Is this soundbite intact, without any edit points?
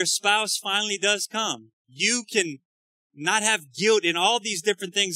no; 1 cut; at 1.8 s

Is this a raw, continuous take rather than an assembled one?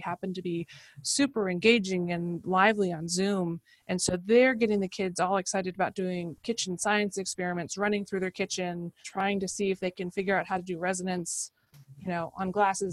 no; 1 cut; at 9.0 s

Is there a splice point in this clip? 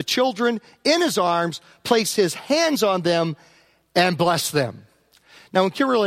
no; 0 cuts

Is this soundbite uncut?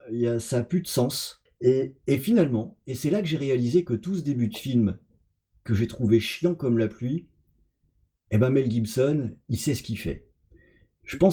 no; 1 cut; at 1.5 s

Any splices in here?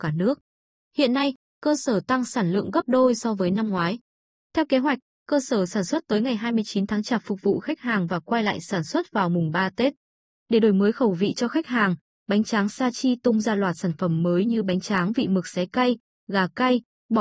no; 0 cuts

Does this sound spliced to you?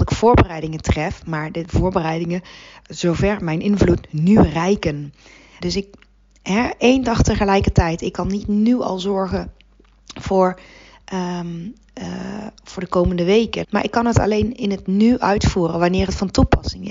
yes; 2 cuts; at 5.6 s, 13.6 s

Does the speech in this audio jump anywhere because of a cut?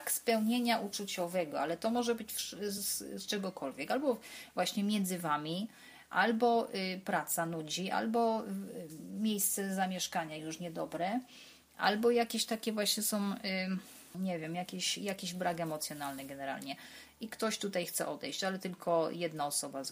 no; 0 cuts

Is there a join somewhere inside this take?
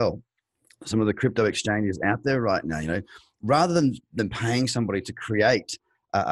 no; 0 cuts

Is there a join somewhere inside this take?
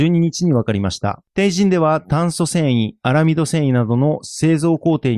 no; 0 cuts

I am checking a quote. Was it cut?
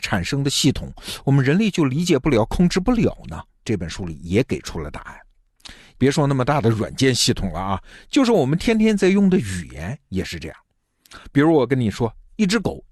yes; 2 cuts; at 3.6 s, 5.9 s

